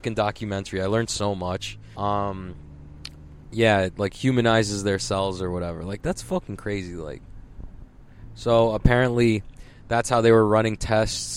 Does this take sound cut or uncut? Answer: cut